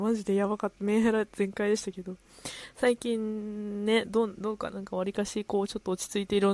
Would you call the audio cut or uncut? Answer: cut